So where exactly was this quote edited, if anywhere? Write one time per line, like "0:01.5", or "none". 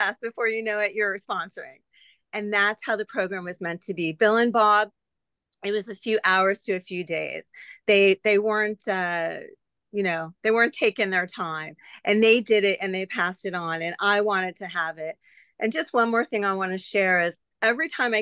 none